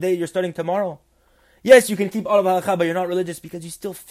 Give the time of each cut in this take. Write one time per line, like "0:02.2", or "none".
none